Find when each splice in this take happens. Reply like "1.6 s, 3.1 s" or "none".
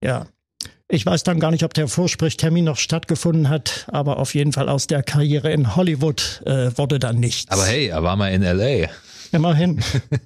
none